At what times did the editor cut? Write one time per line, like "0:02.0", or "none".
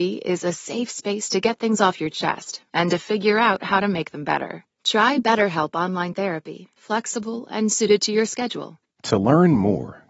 0:06.8
0:08.9